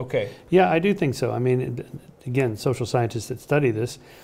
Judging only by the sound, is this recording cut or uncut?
uncut